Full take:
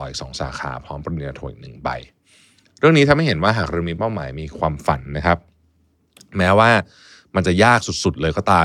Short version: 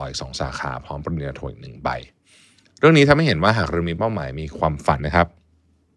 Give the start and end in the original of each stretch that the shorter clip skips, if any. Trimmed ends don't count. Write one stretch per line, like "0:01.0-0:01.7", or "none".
0:05.0-0:05.1